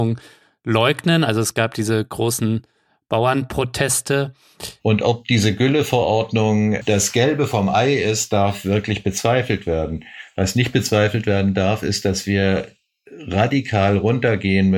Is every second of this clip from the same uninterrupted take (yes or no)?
no